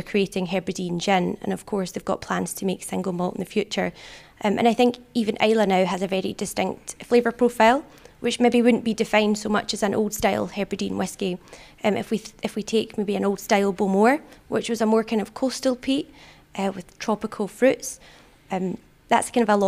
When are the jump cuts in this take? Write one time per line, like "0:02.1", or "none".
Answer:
0:04.2

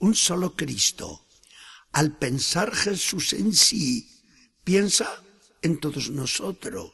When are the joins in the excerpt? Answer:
none

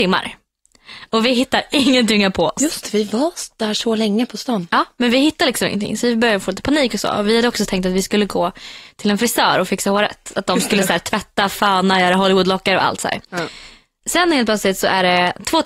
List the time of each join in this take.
none

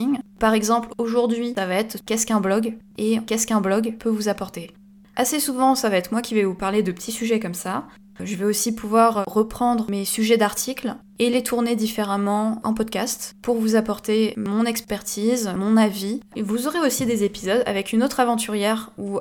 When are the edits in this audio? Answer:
0:16.3

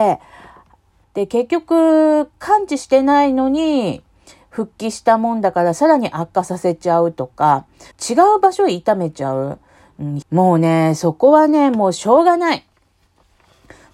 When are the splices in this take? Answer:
0:01.0
0:07.9
0:10.2

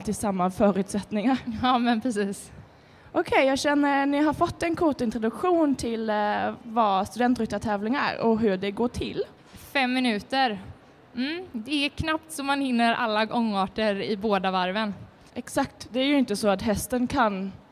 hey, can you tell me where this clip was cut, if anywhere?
0:09.4
0:15.3

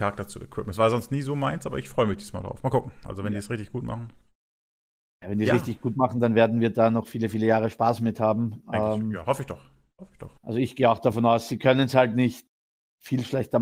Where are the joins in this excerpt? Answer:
0:10.4

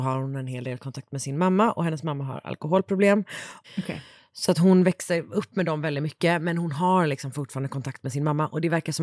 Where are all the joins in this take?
0:03.6

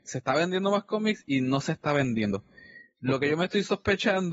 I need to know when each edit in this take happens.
none

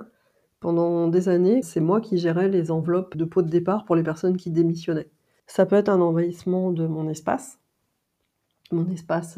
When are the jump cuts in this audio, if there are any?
0:01.6
0:03.1
0:05.4

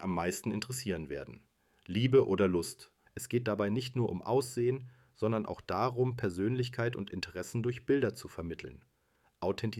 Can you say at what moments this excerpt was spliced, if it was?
0:03.0

